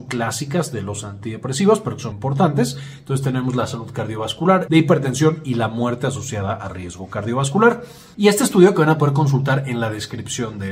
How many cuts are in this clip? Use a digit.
3